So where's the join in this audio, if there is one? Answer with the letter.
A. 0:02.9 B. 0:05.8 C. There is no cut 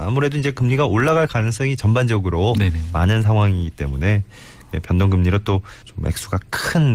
B